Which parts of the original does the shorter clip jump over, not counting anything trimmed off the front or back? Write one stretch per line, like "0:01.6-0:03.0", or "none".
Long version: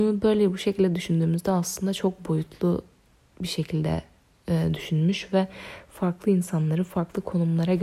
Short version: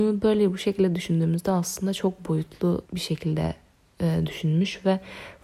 0:02.8-0:03.3